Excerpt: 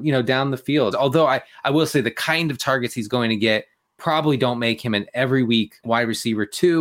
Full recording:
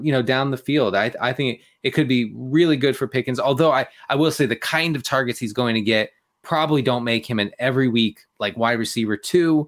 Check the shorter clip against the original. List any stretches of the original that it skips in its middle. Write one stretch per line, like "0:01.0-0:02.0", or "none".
0:00.9-0:03.4
0:08.3-0:08.5